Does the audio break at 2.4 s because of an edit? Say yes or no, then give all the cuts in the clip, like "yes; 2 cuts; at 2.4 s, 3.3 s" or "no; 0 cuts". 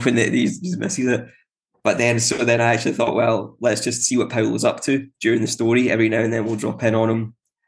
no; 0 cuts